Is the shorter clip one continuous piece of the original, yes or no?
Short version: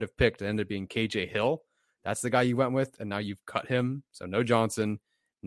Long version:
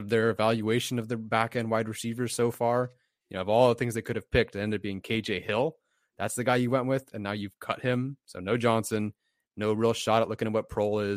yes